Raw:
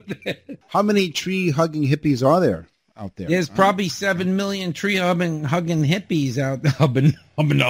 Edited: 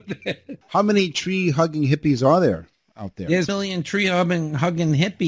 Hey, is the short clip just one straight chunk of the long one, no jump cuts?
no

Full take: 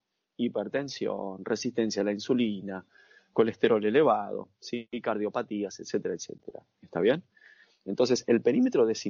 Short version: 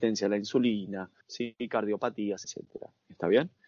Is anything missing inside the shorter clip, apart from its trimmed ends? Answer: yes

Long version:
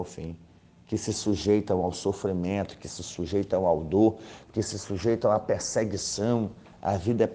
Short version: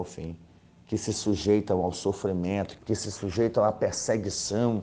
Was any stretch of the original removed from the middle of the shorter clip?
yes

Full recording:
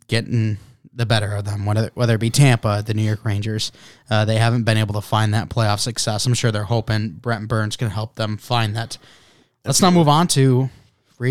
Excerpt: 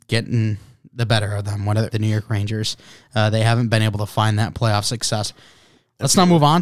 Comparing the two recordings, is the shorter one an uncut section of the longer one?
no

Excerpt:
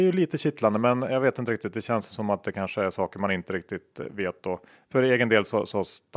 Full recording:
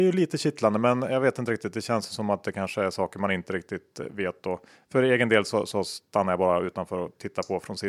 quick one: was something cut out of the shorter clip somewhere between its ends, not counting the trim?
no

